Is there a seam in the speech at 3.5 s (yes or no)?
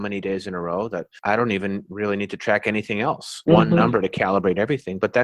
yes